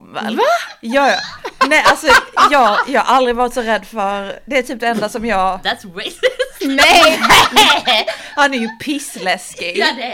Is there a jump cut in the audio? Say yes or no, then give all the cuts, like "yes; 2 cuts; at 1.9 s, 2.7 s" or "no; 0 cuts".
no; 0 cuts